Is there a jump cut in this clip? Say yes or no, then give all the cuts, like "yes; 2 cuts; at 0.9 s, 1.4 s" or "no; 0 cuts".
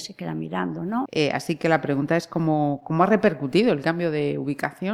yes; 1 cut; at 1.0 s